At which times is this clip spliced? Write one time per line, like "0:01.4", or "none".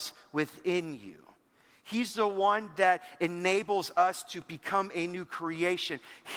none